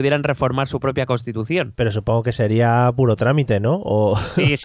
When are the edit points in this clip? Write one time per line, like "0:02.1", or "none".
none